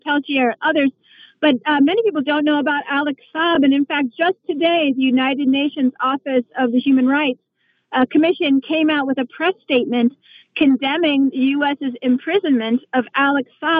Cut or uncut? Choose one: uncut